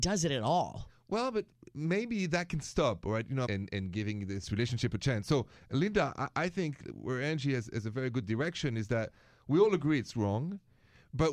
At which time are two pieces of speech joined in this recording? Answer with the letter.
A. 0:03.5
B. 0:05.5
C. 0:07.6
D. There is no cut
A